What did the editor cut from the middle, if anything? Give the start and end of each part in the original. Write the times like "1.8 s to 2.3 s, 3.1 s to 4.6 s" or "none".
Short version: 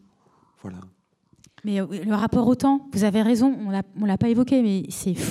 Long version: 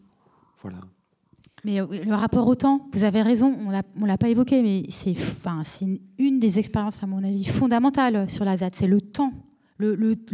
none